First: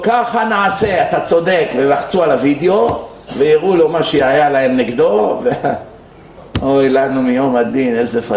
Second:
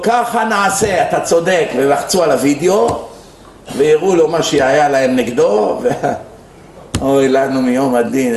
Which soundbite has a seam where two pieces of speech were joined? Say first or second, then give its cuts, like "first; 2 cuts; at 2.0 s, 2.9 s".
first; 1 cut; at 3.2 s